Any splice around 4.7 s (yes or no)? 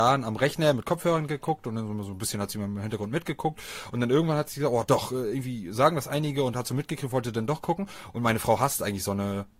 no